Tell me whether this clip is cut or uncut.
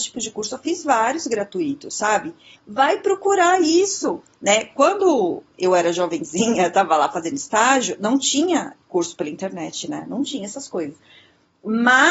cut